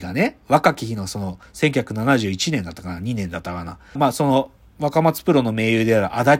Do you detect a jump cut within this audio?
yes; 1 cut; at 4.0 s

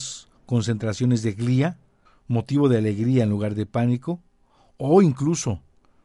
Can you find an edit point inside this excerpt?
yes; 1 cut; at 2.1 s

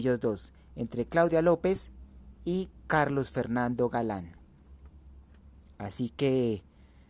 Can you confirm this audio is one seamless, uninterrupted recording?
yes; 0 cuts

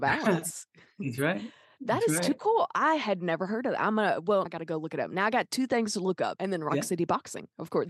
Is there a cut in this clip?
yes; 2 cuts; at 4.5 s, 6.4 s

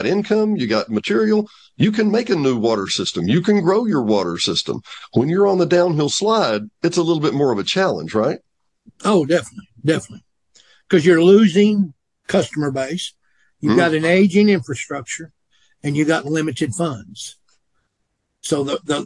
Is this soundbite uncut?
yes; 0 cuts

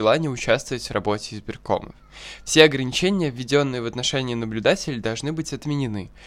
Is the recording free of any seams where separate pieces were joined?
yes; 0 cuts

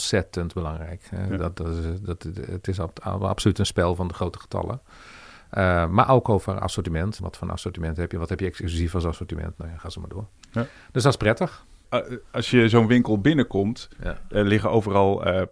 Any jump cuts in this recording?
yes; 1 cut; at 7.2 s

